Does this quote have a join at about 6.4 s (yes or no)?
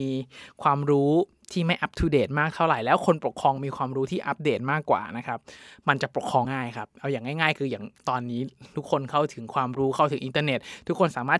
yes